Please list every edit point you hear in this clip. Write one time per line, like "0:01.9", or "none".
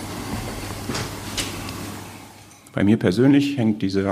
none